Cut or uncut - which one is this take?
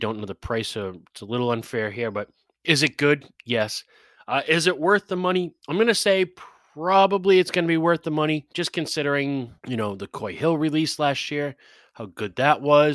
cut